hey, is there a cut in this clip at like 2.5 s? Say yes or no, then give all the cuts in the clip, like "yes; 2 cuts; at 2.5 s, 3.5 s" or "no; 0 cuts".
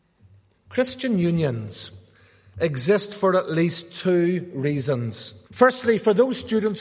no; 1 cut; at 5.5 s